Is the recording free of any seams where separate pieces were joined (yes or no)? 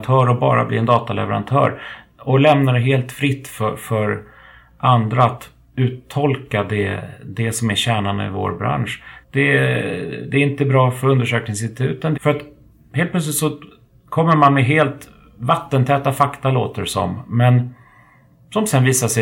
no